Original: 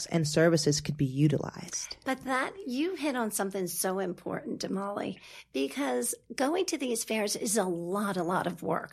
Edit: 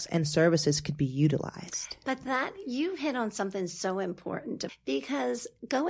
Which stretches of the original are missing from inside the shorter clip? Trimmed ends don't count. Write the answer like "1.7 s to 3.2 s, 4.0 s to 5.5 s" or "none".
4.7 s to 5.4 s

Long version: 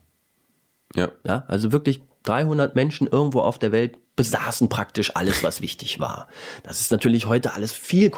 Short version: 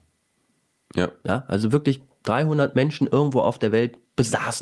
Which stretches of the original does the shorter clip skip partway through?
none

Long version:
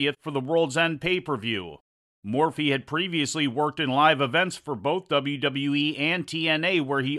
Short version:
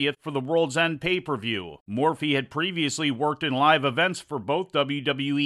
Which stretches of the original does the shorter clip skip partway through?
1.8 s to 2.2 s

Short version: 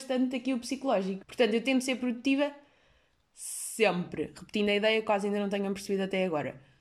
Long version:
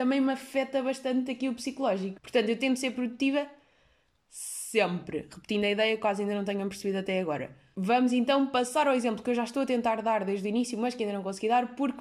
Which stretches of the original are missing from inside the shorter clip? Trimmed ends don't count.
none

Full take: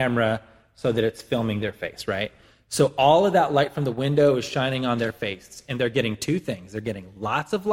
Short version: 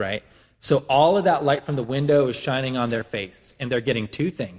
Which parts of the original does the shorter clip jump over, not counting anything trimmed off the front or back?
none

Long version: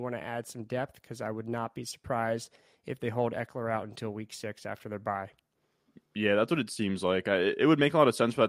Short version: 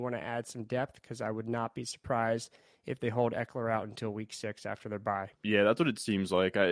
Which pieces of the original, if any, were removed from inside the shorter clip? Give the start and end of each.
5.3 s to 6.1 s

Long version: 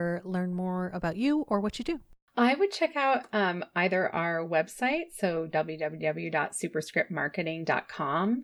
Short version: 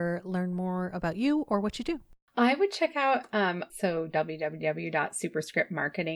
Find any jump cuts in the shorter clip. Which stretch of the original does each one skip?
3.7 s to 5.1 s

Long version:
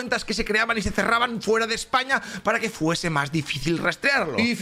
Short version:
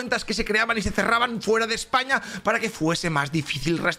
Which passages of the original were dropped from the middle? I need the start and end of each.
none

